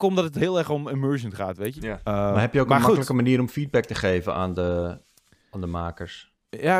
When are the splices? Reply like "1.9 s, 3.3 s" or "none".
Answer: 1.8 s